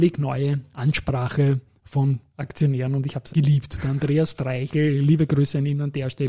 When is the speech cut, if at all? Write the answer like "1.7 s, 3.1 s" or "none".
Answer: 3.3 s

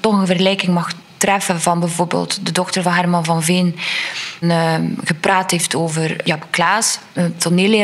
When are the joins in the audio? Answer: 4.4 s

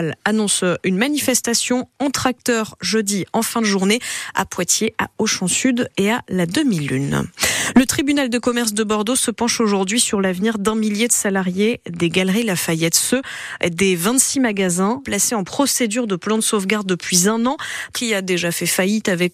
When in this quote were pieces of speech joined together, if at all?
15.0 s, 17.9 s

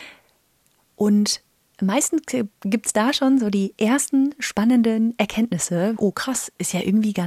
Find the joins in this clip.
6.0 s

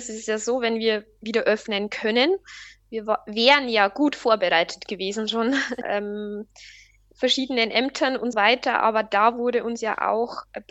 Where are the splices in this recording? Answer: 5.8 s, 8.3 s

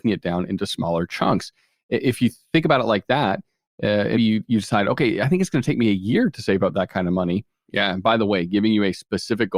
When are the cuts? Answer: 4.1 s, 7.6 s

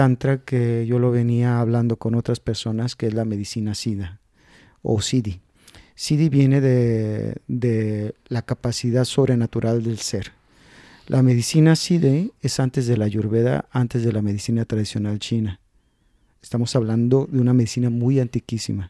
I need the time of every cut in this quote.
none

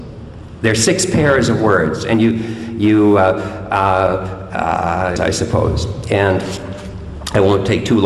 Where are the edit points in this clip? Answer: 5.2 s

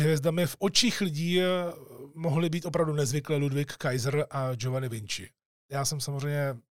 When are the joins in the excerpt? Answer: 5.6 s

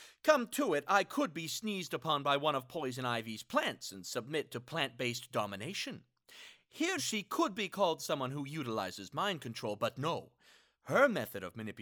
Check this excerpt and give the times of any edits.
7.0 s

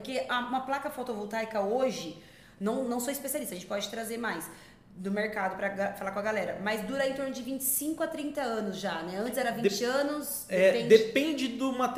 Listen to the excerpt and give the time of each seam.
none

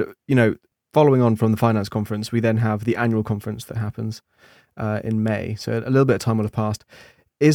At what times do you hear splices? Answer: none

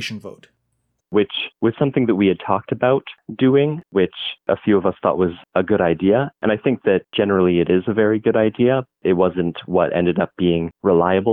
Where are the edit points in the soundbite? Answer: 9.0 s

